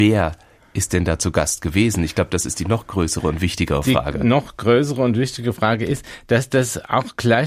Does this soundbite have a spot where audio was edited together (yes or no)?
no